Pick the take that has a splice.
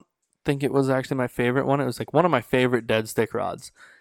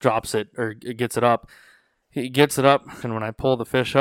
second; 1 cut; at 3.0 s

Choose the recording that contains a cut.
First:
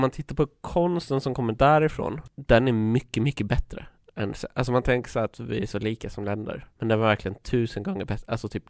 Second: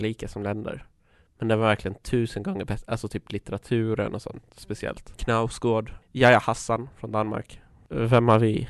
first; 1 cut; at 6.7 s

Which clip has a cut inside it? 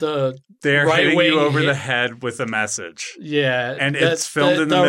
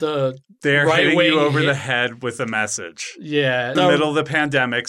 second; 1 cut; at 3.7 s

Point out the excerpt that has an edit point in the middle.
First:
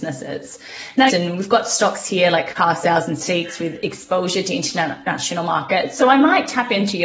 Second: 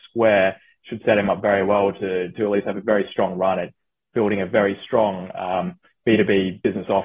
first; 1 cut; at 1.1 s

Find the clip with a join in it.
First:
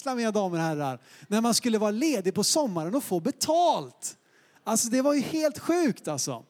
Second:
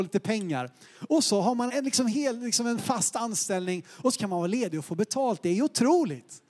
second; 1 cut; at 1.7 s

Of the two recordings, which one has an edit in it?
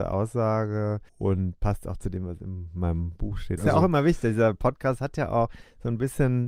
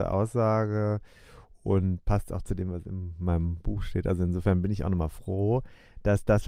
first; 2 cuts; at 1.1 s, 3.6 s

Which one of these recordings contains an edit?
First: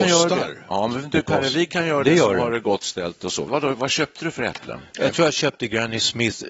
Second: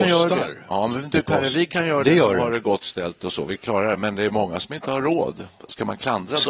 first; 1 cut; at 3.5 s

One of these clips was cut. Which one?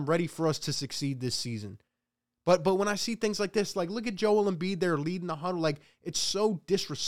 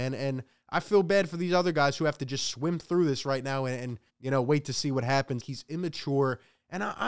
second; 2 cuts; at 4.1 s, 5.4 s

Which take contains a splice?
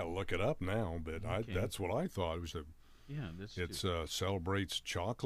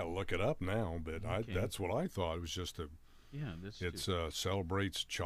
first; 1 cut; at 2.5 s

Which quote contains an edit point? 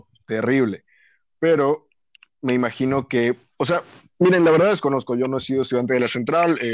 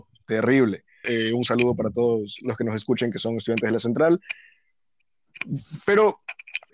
second; 1 cut; at 1.0 s

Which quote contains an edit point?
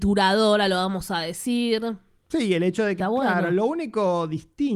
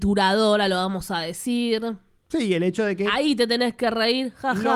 first; 1 cut; at 3.0 s

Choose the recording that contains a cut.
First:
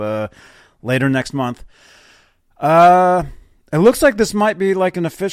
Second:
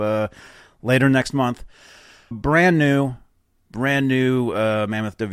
second; 1 cut; at 2.3 s

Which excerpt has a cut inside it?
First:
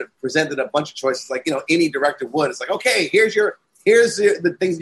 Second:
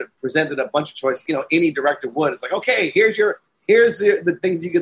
second; 1 cut; at 1.3 s

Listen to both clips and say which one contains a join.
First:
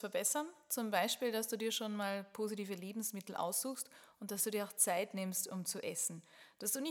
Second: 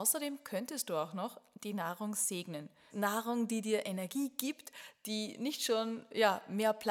second; 1 cut; at 2.9 s

